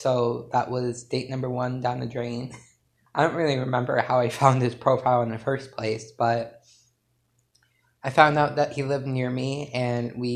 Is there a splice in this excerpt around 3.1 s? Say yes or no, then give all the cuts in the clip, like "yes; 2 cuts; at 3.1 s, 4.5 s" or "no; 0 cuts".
yes; 1 cut; at 3.1 s